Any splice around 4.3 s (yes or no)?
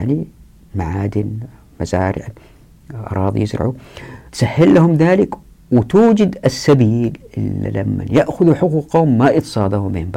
yes